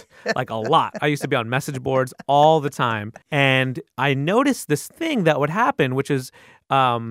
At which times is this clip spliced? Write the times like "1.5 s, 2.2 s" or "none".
3.2 s